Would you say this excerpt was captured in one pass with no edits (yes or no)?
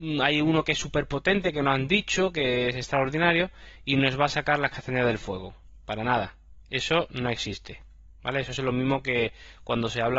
yes